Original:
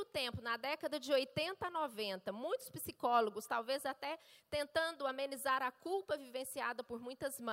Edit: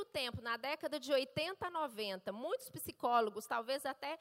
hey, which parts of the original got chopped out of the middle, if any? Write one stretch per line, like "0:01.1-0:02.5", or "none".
none